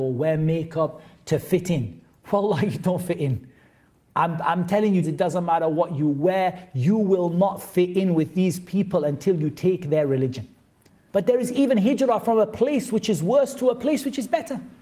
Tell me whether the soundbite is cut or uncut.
cut